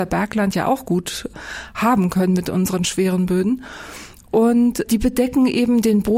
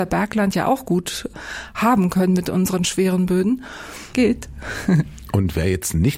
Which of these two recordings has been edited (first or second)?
second